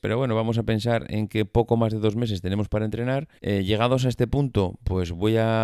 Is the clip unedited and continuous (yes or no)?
no